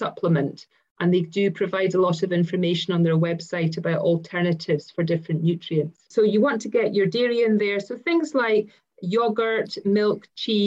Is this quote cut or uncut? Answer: uncut